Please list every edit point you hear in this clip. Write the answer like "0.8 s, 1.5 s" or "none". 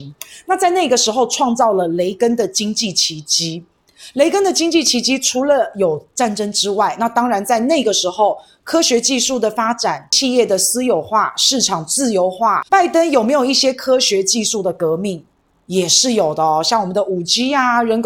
12.7 s